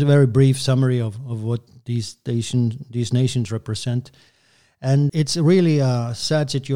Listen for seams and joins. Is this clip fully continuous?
no; 1 cut; at 5.1 s

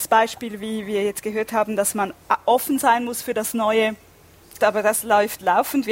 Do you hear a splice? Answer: yes; 1 cut; at 4.6 s

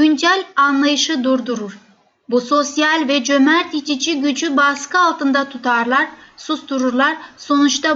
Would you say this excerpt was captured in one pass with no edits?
yes; 0 cuts

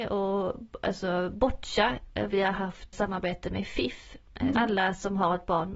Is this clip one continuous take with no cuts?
no; 2 cuts; at 2.9 s, 4.5 s

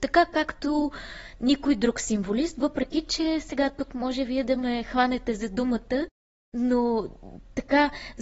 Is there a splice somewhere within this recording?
no; 0 cuts

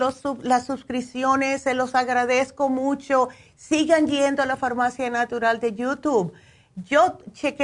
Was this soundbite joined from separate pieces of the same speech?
no; 0 cuts

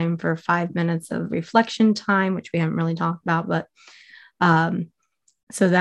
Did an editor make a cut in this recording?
no; 0 cuts

